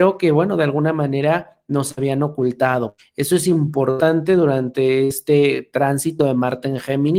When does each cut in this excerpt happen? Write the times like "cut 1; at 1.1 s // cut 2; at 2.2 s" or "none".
none